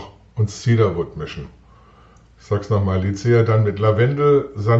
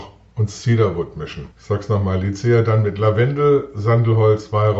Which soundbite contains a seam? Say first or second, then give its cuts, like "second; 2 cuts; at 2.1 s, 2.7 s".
second; 1 cut; at 1.5 s